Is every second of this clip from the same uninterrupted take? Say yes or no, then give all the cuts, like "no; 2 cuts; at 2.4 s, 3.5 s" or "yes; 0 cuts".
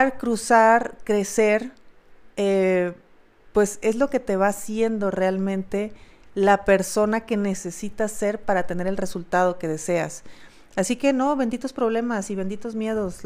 yes; 0 cuts